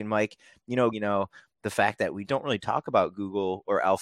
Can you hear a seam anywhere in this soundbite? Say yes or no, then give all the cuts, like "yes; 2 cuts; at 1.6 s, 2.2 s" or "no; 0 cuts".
yes; 2 cuts; at 0.9 s, 2.2 s